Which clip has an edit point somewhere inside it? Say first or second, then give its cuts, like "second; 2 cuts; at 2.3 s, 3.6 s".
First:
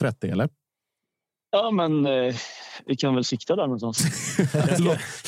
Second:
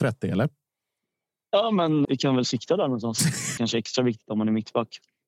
second; 2 cuts; at 2.1 s, 3.6 s